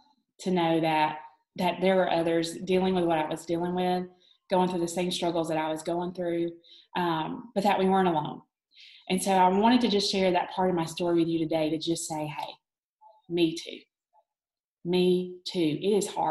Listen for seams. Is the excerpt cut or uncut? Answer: uncut